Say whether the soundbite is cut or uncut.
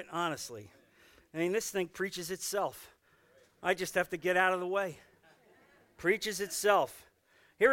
uncut